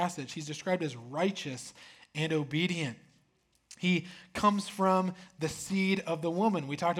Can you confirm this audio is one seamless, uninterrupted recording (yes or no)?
yes